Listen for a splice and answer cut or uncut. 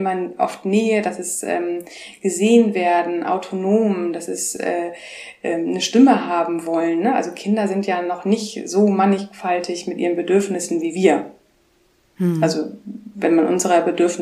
uncut